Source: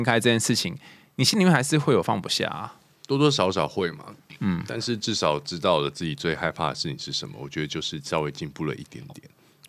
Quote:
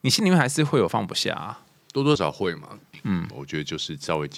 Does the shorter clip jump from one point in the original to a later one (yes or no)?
yes